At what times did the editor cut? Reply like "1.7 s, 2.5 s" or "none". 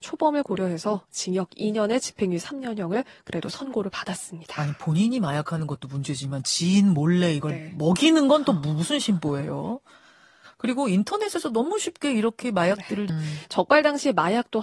13.1 s